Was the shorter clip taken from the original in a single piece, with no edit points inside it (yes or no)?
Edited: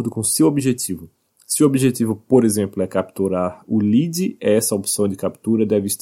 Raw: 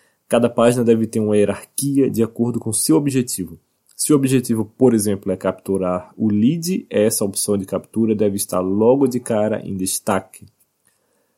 yes